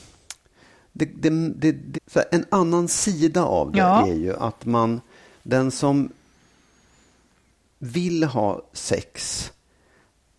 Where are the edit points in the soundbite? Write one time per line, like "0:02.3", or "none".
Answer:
0:01.9